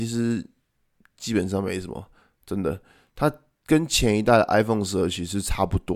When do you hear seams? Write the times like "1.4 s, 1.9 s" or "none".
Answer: none